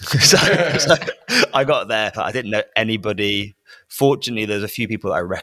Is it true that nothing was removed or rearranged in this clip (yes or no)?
yes